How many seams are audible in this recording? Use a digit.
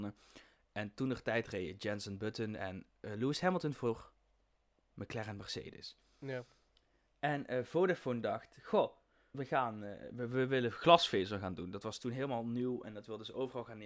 1